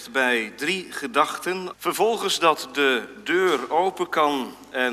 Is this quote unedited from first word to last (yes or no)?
no